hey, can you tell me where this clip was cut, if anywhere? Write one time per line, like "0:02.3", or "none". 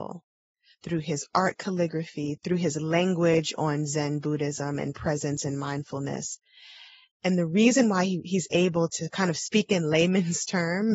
0:08.9